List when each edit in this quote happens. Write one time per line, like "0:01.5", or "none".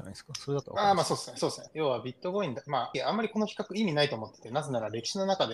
0:01.7
0:02.9

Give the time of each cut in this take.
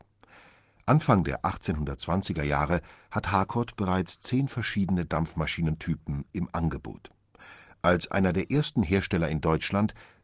none

